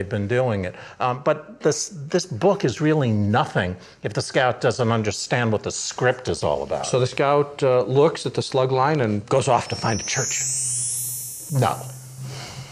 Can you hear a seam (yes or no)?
yes